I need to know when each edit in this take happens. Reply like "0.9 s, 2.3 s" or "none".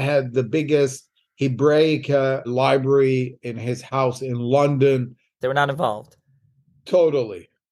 2.4 s, 5.4 s